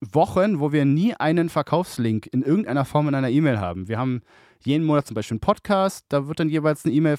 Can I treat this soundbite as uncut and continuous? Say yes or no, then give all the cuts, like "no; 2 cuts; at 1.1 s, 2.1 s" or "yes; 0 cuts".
yes; 0 cuts